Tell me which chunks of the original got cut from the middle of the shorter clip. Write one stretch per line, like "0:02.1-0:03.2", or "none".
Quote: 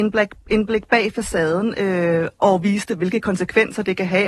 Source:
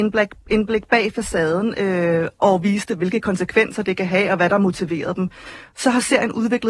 none